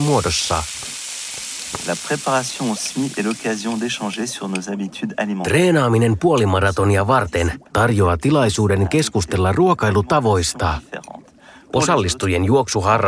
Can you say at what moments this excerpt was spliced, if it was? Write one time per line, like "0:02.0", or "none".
none